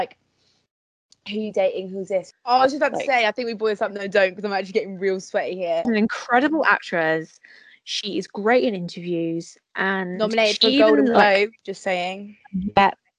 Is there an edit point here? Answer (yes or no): yes